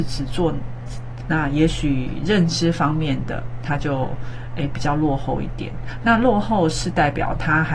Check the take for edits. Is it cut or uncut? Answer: cut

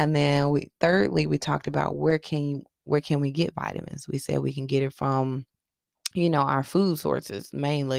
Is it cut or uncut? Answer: uncut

